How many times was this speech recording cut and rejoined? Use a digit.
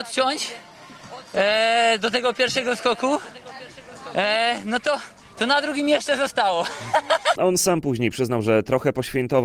1